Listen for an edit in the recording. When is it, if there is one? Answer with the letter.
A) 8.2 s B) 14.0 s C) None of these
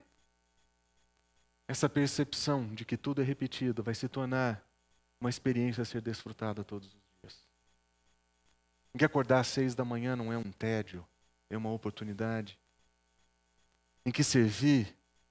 C